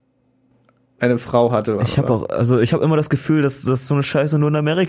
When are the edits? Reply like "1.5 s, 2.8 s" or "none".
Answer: 1.8 s